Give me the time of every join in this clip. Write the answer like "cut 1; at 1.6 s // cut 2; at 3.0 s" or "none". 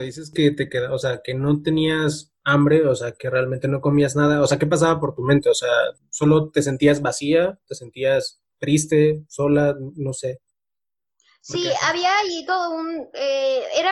none

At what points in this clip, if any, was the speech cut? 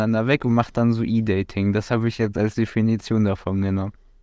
none

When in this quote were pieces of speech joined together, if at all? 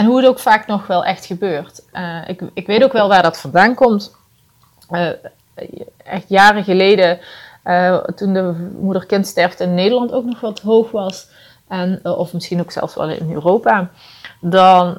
none

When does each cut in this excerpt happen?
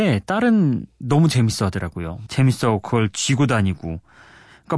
cut 1; at 2.3 s

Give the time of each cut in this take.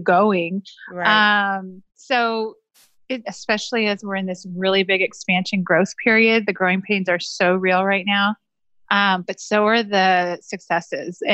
cut 1; at 1.9 s // cut 2; at 3.2 s

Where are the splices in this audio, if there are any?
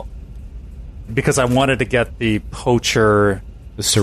cut 1; at 1.1 s

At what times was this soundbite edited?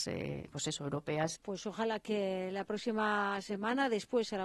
cut 1; at 1.4 s

